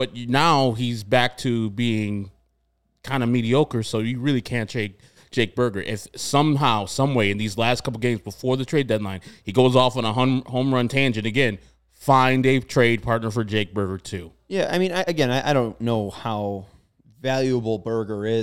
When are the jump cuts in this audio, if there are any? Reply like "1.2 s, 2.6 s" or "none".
none